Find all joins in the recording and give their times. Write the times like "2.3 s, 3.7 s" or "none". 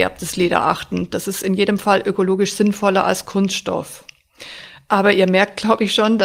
none